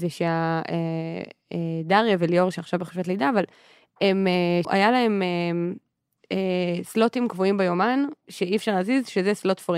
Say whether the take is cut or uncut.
cut